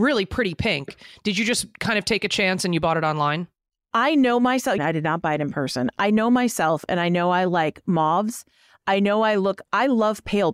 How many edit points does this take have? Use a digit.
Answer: 1